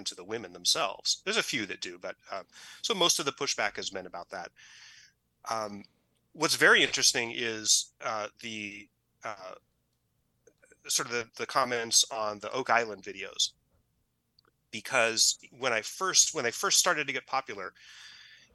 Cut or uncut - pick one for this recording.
cut